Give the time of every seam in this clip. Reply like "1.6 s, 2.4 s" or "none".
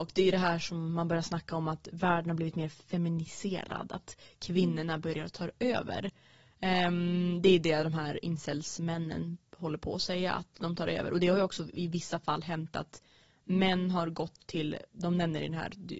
none